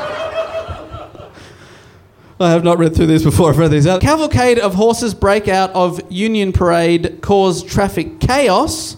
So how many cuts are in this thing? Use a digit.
1